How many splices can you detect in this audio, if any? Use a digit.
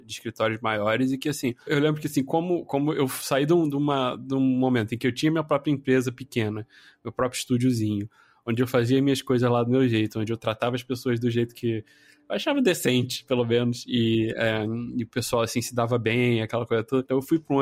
0